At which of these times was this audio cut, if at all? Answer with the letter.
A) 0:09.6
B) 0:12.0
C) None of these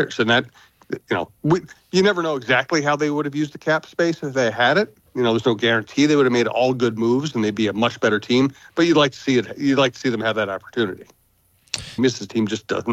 B